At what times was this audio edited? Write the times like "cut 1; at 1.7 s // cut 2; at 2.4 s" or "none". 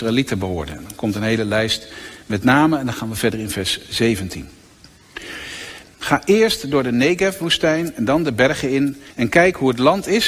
cut 1; at 5.8 s // cut 2; at 9.1 s